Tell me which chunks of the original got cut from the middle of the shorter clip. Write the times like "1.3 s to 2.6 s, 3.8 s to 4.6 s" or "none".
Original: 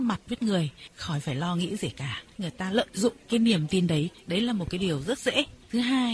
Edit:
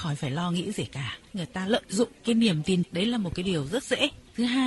3.9 s to 4.2 s